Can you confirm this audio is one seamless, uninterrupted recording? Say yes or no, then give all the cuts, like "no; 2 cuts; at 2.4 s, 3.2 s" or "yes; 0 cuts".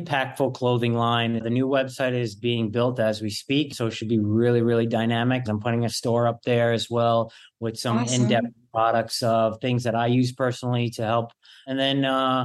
no; 2 cuts; at 1.4 s, 5.5 s